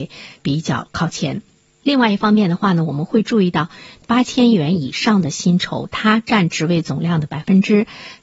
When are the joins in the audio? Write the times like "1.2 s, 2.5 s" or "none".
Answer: 4.0 s